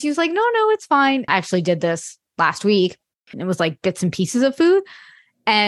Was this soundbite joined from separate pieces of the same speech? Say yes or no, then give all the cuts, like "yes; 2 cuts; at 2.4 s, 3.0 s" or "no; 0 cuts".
yes; 2 cuts; at 1.3 s, 3.3 s